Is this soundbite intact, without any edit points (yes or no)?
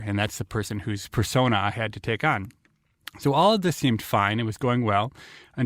yes